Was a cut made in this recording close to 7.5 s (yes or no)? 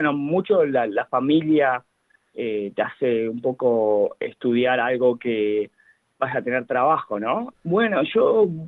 yes